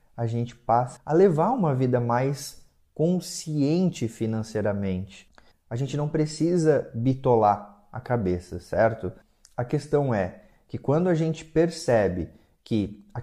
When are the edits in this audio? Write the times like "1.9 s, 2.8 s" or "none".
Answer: 1.0 s, 5.5 s